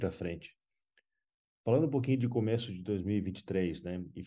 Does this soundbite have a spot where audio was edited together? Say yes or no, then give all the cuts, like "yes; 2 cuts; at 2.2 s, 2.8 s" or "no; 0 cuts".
no; 0 cuts